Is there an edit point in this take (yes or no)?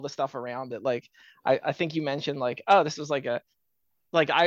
no